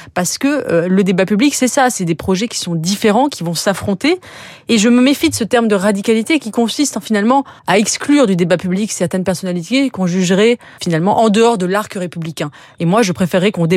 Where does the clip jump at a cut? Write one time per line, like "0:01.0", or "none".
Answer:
0:07.6
0:10.8